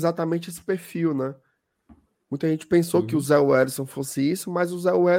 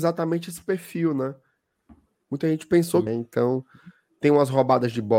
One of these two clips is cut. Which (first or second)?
second